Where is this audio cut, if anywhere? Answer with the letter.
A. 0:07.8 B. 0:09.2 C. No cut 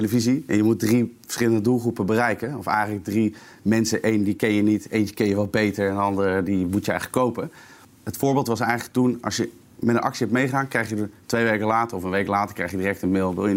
A